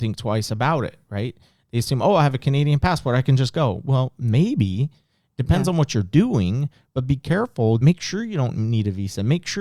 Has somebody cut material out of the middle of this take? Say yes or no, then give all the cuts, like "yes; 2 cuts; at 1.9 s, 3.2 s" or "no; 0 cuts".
yes; 1 cut; at 7.8 s